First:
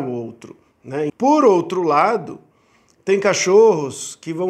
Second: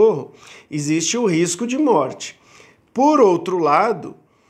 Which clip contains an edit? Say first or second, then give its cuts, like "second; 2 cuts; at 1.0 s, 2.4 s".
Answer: first; 1 cut; at 1.1 s